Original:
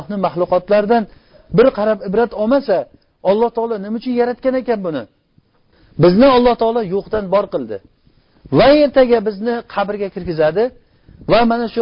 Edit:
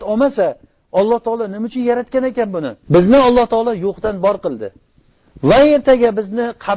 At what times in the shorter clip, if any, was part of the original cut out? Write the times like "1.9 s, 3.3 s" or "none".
2.8 s